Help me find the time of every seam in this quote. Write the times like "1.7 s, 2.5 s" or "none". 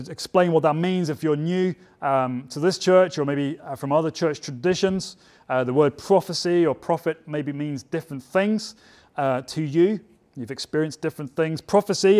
none